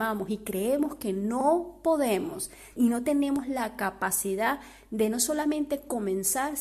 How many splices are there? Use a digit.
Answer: 0